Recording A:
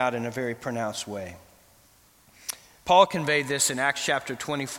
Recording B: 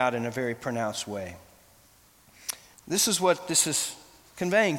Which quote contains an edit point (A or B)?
B